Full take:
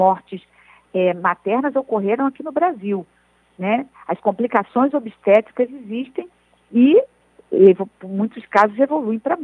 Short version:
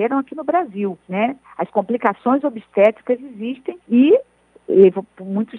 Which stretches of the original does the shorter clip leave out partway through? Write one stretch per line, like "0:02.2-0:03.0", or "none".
0:03.1-0:03.5
0:06.3-0:06.6

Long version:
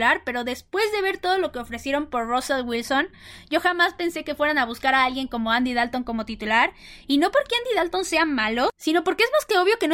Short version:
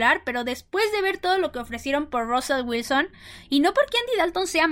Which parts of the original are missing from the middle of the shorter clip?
0:03.4-0:07.0

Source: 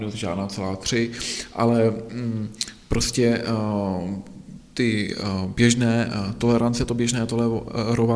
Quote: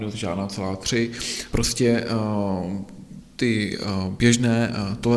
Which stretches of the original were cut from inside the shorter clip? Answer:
0:01.5-0:02.9

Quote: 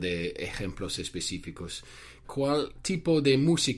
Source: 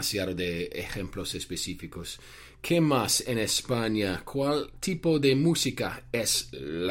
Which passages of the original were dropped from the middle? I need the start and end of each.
0:02.6-0:04.2

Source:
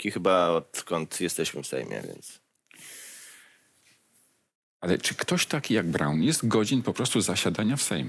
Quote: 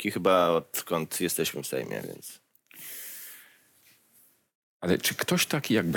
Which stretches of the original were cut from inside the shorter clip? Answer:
none

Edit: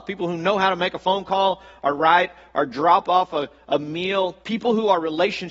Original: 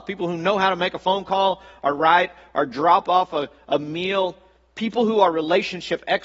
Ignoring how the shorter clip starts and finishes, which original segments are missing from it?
0:04.4-0:04.7

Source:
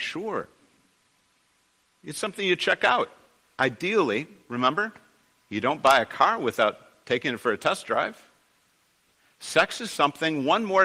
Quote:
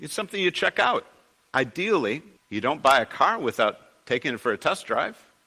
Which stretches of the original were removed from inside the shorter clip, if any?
0:04.4-0:05.4

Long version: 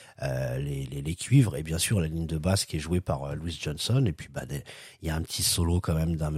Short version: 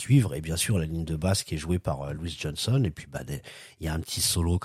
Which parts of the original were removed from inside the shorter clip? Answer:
none

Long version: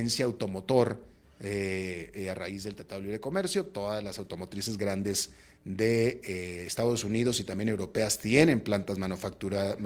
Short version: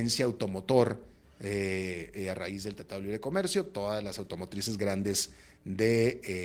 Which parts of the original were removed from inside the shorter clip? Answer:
none

